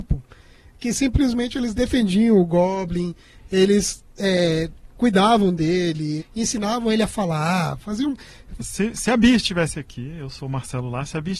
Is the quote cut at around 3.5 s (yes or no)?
no